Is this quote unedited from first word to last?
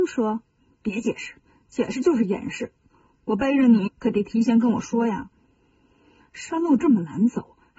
no; 2 cuts; at 3.9 s, 6.2 s

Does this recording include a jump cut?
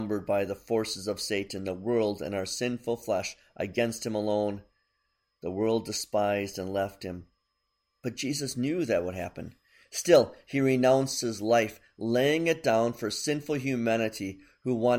no; 0 cuts

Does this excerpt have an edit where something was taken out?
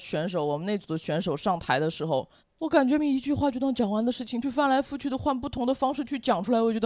yes; 2 cuts; at 3.0 s, 4.4 s

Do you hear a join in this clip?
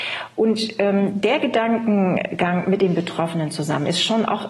no; 0 cuts

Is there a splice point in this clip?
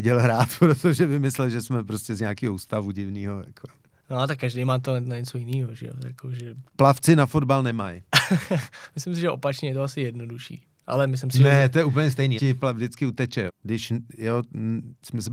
yes; 2 cuts; at 12.4 s, 13.5 s

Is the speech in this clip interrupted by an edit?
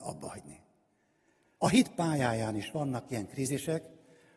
yes; 1 cut; at 1.6 s

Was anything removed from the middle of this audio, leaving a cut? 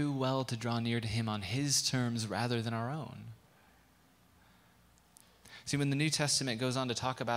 no; 0 cuts

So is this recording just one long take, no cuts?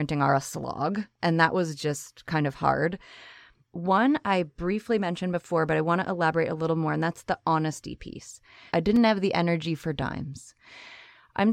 no; 2 cuts; at 3.6 s, 8.7 s

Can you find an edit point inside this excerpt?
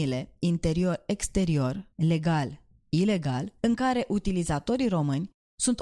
yes; 2 cuts; at 1.9 s, 3.6 s

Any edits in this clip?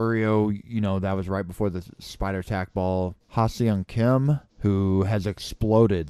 yes; 2 cuts; at 3.2 s, 4.5 s

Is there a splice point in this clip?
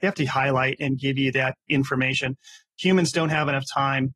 no; 0 cuts

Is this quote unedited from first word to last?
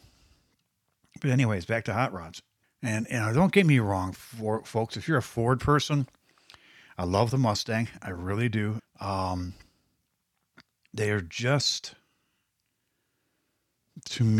no; 2 cuts; at 2.6 s, 8.8 s

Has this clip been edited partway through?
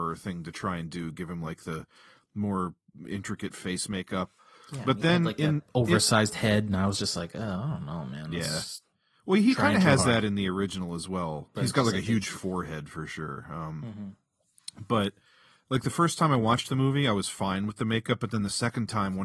yes; 1 cut; at 11.5 s

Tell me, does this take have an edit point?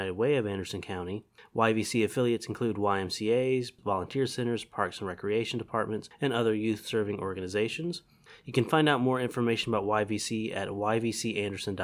yes; 1 cut; at 3.8 s

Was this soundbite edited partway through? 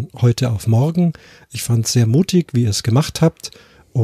no; 0 cuts

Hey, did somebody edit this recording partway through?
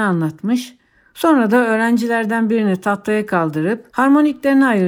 yes; 1 cut; at 3.9 s

